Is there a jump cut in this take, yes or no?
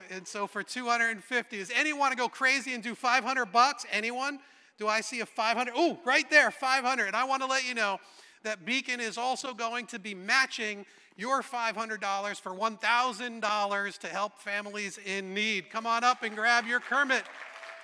no